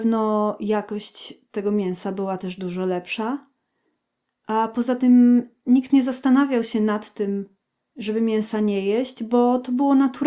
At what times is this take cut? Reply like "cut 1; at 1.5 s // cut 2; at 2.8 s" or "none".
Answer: none